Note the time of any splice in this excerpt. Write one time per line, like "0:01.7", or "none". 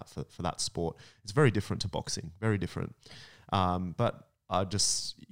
none

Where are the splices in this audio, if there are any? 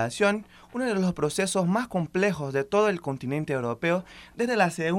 none

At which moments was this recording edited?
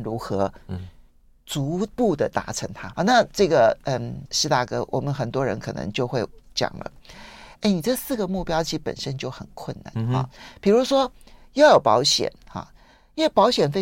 0:02.9
0:04.3
0:09.9

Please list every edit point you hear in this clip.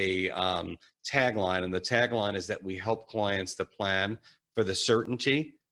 none

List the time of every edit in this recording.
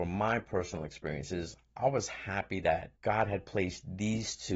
0:03.0

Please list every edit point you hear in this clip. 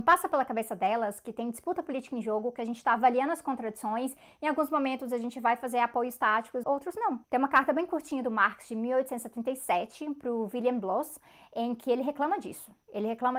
0:06.6

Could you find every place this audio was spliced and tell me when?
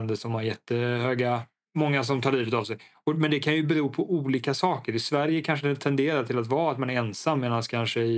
none

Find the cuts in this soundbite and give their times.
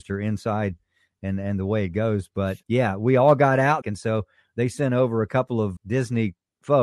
0:02.6
0:03.8
0:05.8

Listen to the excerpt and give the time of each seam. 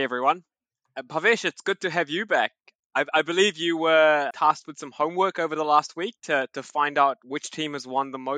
0:04.3

